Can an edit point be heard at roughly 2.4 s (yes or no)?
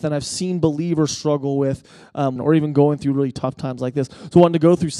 yes